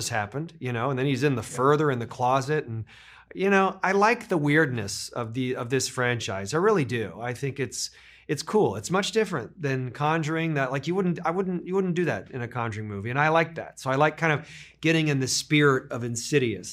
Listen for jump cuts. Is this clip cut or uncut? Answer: uncut